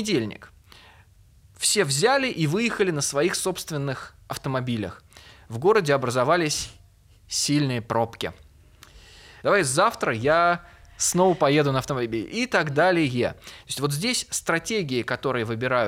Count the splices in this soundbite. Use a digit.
1